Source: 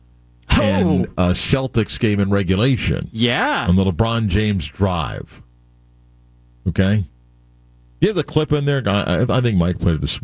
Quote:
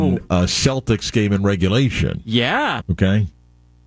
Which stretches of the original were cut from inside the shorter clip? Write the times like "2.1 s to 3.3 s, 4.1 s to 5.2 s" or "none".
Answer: 3.7 s to 6.5 s